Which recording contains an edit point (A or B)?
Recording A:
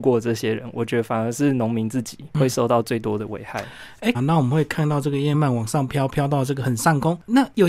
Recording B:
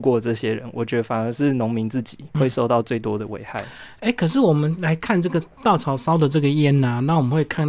A